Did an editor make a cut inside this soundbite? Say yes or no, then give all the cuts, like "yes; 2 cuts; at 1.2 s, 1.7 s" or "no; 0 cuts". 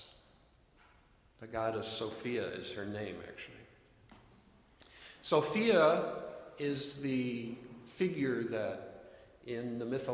no; 0 cuts